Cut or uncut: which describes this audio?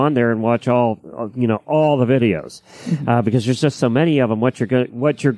uncut